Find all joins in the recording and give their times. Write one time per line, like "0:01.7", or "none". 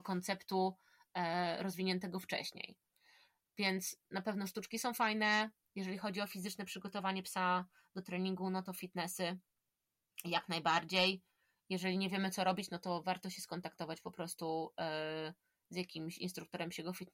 none